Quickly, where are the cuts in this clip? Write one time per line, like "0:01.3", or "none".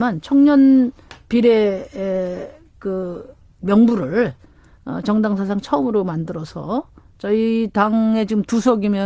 none

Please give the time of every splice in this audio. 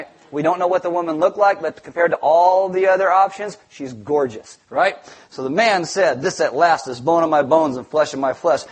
none

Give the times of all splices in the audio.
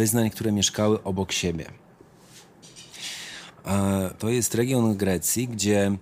0:04.2

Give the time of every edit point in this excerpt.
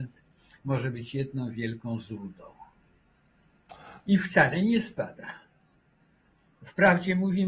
0:04.0

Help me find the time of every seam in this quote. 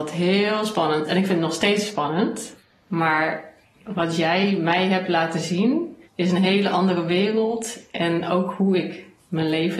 0:06.1

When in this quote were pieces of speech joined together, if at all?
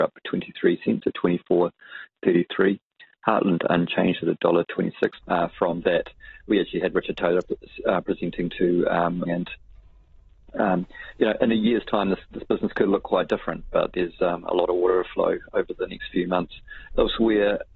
0:05.2
0:09.2

